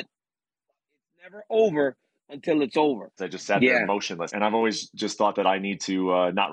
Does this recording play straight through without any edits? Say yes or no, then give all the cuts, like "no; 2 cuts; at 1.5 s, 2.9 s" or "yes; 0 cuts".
no; 2 cuts; at 3.2 s, 4.3 s